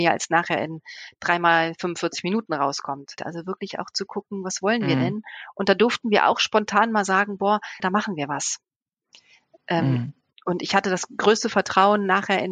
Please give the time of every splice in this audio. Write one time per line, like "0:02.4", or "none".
0:03.2
0:07.8